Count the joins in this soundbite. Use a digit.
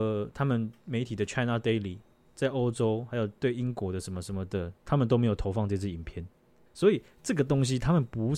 1